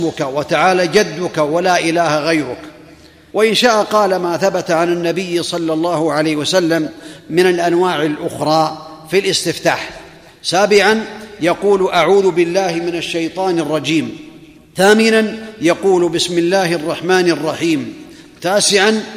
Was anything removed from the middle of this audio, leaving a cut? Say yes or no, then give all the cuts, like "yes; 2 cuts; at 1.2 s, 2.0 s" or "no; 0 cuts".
no; 0 cuts